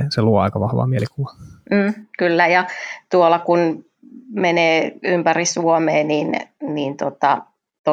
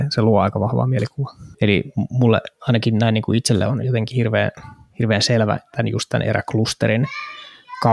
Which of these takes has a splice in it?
second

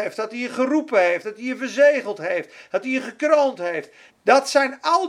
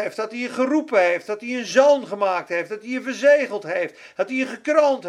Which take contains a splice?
first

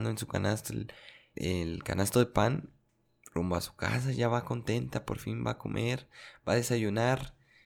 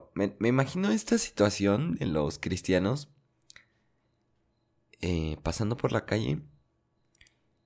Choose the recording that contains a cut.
first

